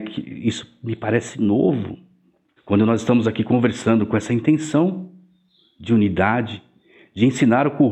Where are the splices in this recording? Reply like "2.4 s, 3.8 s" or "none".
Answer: 2.6 s